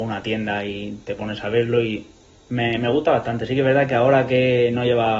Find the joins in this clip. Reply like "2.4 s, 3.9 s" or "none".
none

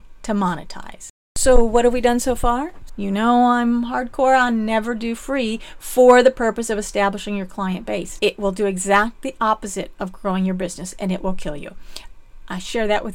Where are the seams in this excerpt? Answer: 2.9 s, 8.2 s

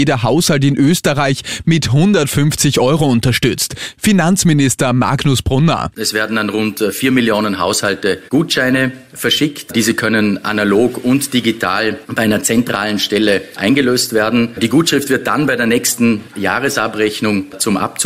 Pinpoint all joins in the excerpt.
none

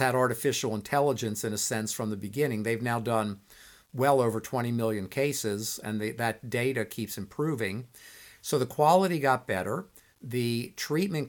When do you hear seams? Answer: none

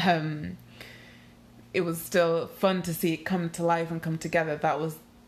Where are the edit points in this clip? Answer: 1.6 s

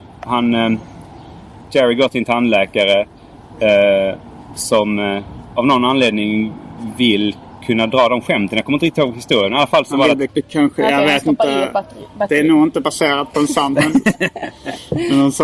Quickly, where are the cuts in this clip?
10.3 s

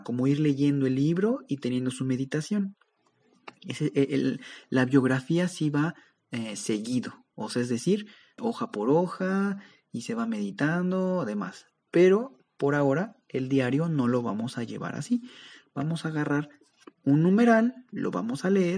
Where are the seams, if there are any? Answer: 8.4 s

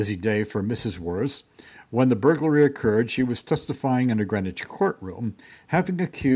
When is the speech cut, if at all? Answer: none

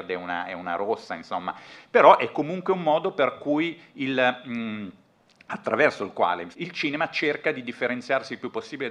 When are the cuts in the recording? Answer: 6.5 s

